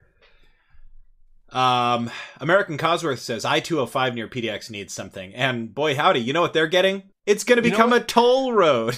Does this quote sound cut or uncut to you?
cut